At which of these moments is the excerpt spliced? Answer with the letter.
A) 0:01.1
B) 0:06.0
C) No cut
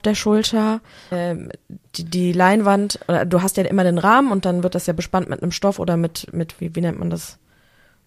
A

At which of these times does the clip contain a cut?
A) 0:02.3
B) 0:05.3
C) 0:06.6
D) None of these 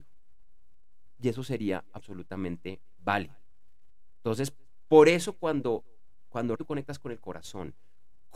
C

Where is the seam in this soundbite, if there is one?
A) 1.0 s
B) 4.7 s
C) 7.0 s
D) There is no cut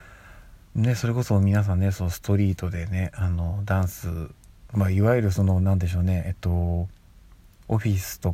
B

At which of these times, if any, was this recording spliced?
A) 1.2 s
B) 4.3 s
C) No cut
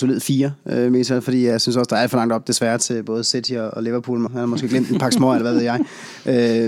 B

